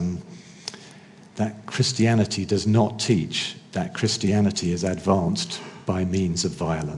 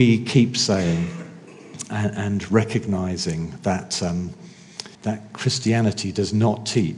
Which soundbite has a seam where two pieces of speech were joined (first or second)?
second